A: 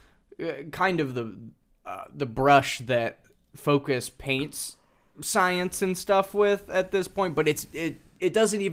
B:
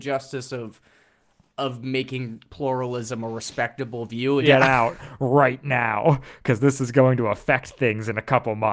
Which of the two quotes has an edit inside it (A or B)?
B